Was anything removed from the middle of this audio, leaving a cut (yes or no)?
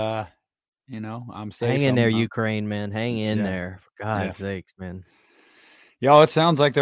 no